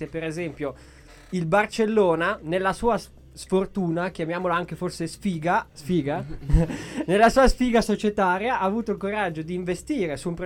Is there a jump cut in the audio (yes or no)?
yes